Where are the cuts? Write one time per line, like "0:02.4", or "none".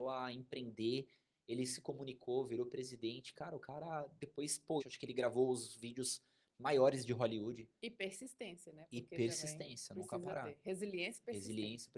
0:04.8
0:07.8